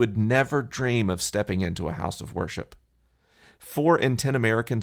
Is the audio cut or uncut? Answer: uncut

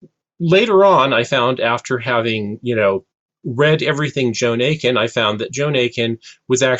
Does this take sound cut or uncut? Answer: uncut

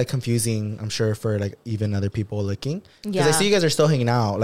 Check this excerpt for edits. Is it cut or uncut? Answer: uncut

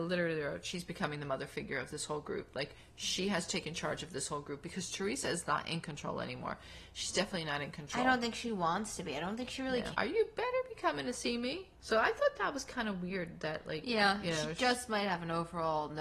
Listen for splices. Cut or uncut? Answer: cut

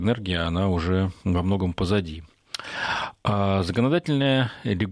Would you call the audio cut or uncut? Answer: uncut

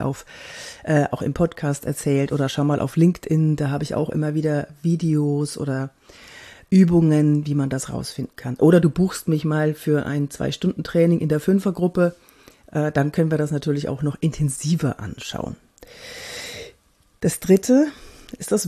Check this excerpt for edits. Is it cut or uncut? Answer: uncut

